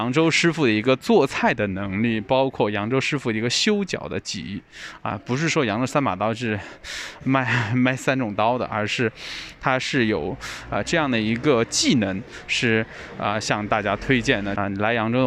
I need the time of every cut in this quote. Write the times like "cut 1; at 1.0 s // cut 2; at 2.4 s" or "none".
none